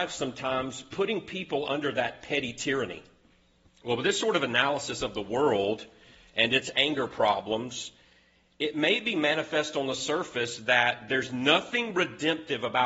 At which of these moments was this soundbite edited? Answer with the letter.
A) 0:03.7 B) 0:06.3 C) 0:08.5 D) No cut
A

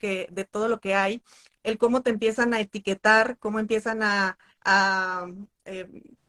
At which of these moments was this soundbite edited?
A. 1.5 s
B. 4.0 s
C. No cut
C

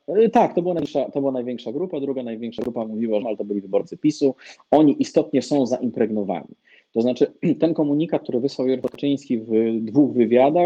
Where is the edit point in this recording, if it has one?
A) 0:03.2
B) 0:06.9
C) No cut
A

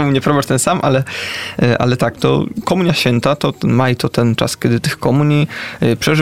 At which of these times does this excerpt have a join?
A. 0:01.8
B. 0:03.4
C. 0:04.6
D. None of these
D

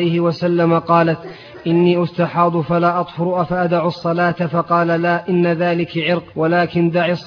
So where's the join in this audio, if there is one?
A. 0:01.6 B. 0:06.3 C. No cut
B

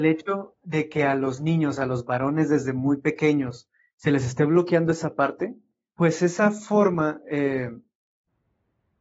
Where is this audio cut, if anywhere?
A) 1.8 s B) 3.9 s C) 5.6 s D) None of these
D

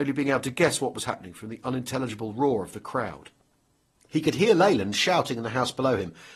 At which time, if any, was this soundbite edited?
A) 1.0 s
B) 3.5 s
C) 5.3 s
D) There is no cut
D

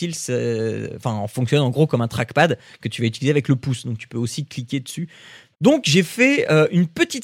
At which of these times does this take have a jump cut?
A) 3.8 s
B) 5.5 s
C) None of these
B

